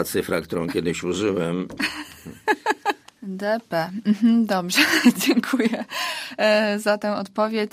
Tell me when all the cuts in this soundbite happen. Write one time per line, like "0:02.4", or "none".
0:03.0